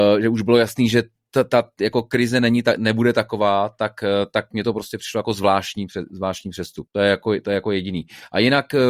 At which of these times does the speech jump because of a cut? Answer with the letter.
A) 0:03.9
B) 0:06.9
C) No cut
B